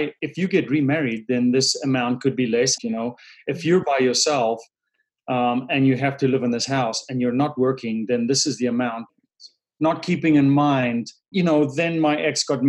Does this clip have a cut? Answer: yes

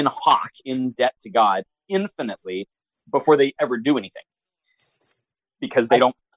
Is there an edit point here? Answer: no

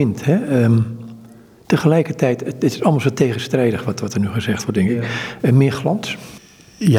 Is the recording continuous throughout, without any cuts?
yes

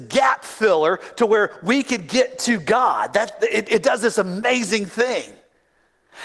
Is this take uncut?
yes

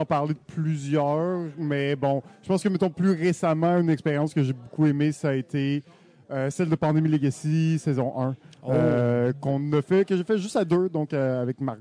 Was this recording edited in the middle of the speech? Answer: no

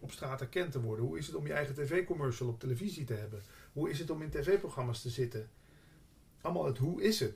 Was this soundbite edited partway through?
no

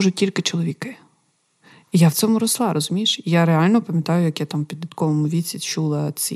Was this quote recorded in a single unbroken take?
yes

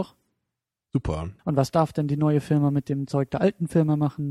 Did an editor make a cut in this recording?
yes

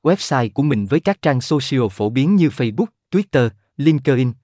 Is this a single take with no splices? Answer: no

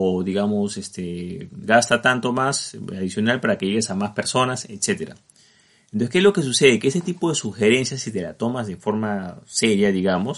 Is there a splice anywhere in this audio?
no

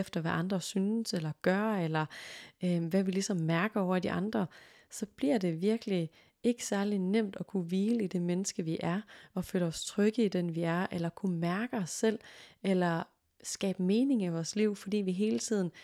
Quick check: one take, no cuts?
yes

